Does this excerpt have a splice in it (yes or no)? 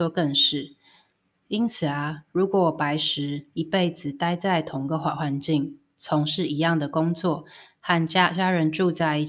no